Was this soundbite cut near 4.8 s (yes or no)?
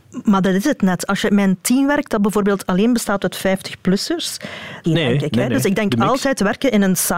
yes